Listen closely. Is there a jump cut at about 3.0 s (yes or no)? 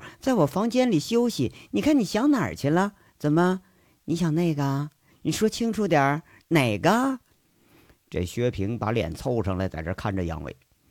no